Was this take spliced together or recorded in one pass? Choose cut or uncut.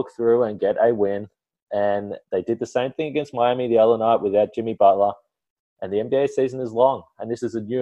uncut